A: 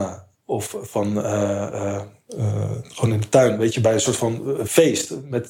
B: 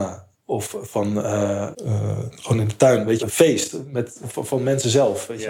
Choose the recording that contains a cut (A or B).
B